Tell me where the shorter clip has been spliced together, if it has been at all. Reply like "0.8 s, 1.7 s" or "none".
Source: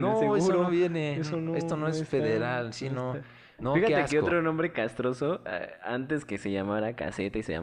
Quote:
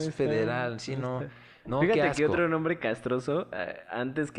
none